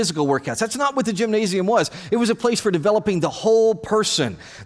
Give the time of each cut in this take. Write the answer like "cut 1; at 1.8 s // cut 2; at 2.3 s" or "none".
none